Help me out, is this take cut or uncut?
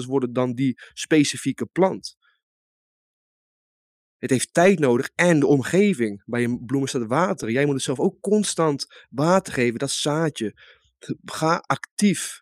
uncut